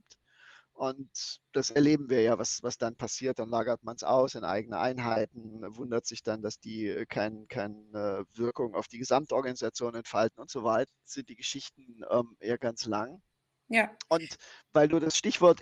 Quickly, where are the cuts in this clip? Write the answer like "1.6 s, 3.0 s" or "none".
10.9 s